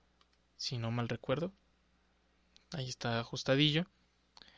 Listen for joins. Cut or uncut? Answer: uncut